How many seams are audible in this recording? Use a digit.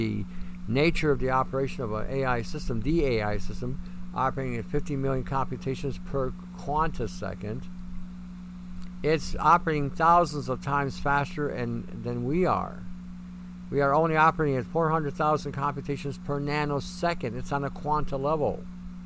0